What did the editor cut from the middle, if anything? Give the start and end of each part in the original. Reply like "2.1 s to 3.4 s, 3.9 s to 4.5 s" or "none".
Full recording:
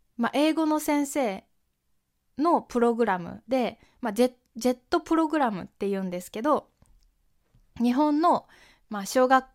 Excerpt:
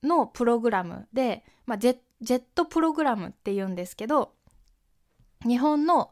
none